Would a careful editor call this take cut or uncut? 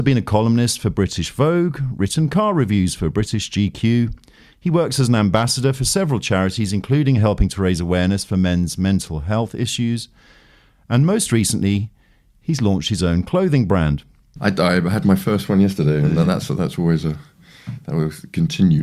cut